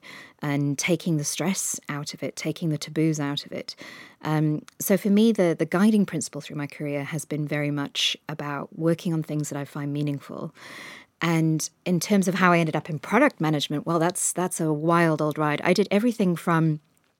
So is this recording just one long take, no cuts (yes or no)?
yes